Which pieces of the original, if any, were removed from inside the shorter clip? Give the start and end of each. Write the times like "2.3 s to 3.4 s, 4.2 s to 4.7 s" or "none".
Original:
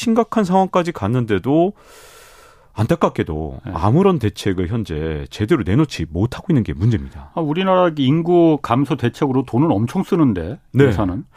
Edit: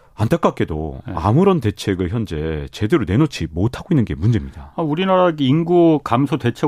none